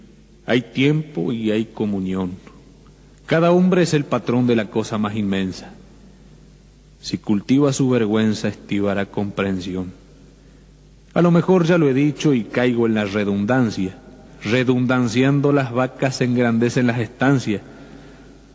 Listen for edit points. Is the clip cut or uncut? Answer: cut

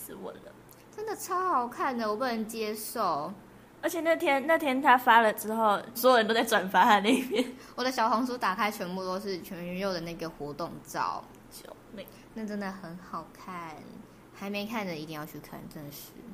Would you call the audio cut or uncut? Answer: cut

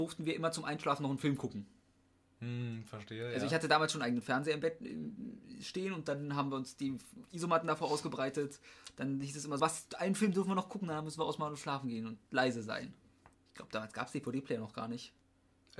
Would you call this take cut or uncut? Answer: cut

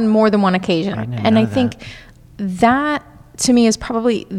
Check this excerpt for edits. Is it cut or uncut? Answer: cut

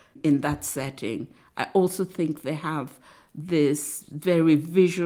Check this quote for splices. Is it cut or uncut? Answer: uncut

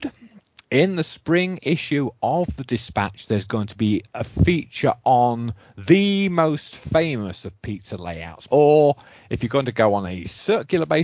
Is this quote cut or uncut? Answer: cut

